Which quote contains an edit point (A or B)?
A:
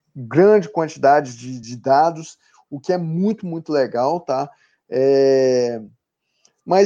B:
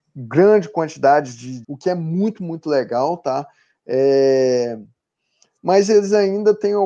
B